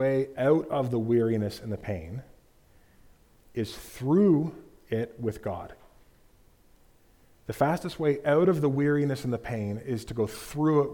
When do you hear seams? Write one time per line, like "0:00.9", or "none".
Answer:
none